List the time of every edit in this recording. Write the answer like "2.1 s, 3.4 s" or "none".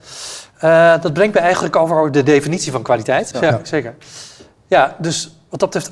3.3 s